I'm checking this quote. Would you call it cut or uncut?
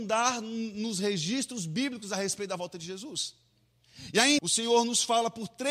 cut